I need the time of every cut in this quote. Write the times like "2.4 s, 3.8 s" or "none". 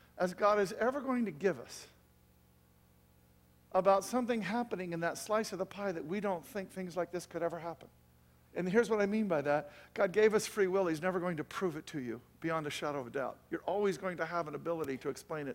8.5 s